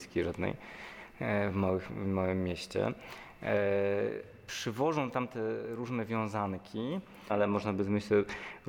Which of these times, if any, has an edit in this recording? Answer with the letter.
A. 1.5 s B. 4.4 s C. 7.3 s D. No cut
C